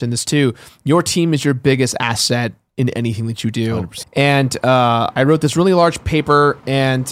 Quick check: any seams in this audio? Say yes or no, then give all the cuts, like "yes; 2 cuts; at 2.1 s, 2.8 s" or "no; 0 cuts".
yes; 1 cut; at 4.0 s